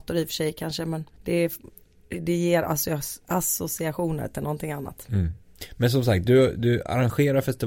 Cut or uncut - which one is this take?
cut